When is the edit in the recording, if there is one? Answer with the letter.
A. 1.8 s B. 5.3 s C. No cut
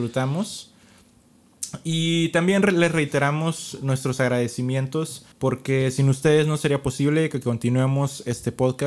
B